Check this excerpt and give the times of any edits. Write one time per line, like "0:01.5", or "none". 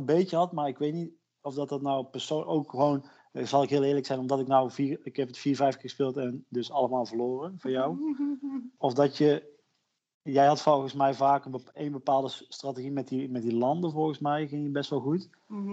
none